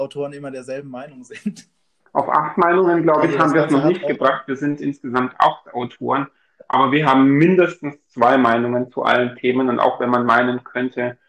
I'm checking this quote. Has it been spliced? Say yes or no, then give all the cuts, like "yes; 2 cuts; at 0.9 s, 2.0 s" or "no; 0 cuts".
no; 0 cuts